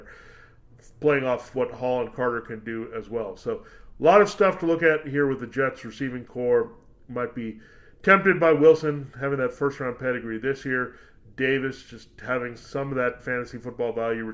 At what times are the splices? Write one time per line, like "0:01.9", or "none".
none